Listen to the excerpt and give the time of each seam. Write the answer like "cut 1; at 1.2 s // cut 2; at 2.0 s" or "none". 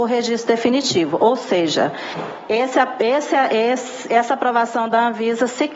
none

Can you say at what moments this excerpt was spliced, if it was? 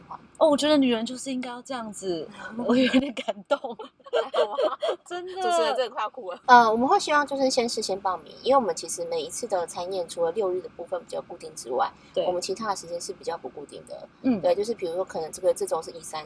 cut 1; at 6.4 s

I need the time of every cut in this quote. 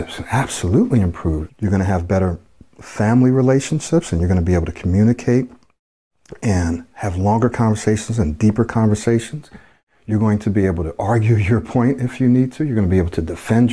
cut 1; at 1.5 s

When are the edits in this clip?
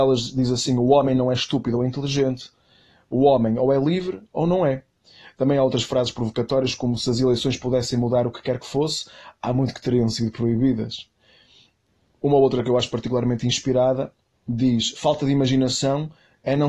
none

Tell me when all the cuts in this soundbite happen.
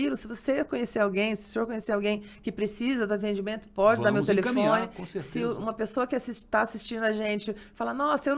none

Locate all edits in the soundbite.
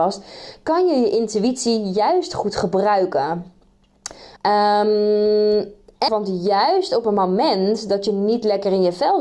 cut 1; at 4.4 s // cut 2; at 6.1 s

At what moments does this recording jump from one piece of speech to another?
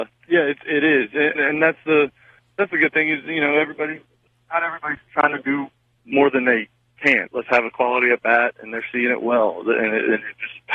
cut 1; at 1.4 s // cut 2; at 7.3 s

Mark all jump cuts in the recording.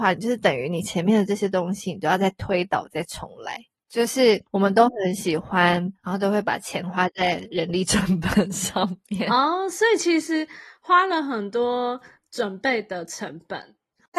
cut 1; at 6.0 s

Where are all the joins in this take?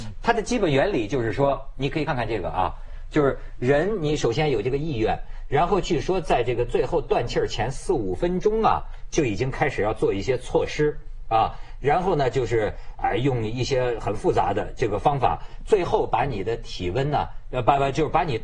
cut 1; at 2.1 s

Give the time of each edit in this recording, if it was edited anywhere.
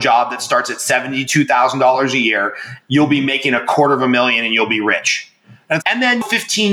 cut 1; at 2.8 s // cut 2; at 5.8 s

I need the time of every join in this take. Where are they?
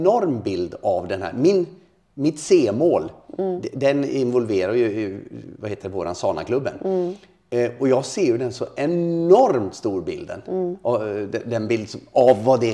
none

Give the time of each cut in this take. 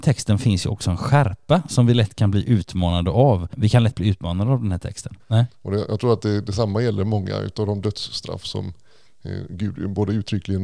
cut 1; at 5.2 s

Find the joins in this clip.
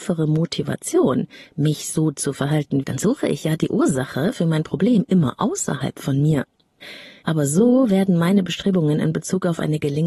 cut 1; at 2.8 s // cut 2; at 7.2 s

